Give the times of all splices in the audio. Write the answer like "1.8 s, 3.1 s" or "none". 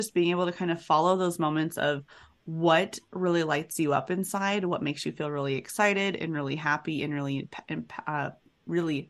none